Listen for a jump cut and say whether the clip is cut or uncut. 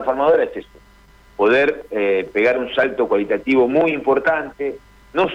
uncut